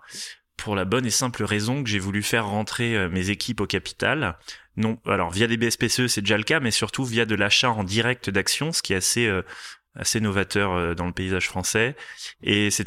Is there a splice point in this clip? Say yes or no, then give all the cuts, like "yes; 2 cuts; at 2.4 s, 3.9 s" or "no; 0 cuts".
no; 0 cuts